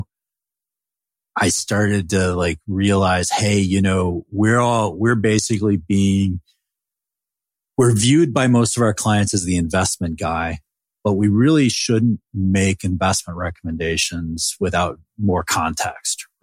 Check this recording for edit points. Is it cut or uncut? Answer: uncut